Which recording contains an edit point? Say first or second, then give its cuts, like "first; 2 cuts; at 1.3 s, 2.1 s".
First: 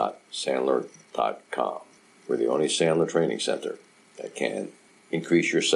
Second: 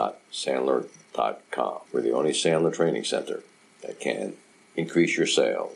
second; 1 cut; at 1.9 s